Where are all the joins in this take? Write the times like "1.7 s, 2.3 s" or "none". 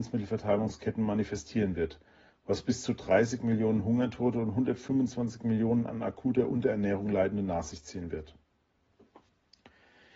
none